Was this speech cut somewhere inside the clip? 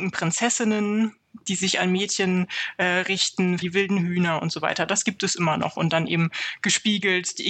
yes; 1 cut; at 3.6 s

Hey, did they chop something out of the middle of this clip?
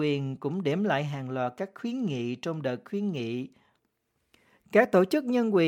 no; 0 cuts

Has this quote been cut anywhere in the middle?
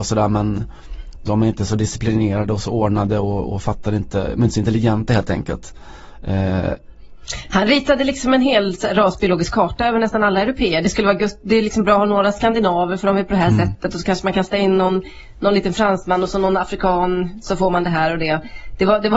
no; 0 cuts

